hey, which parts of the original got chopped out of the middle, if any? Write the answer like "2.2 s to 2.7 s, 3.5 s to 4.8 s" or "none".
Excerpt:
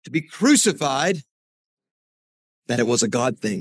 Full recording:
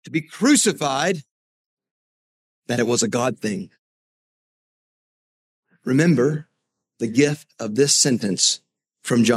none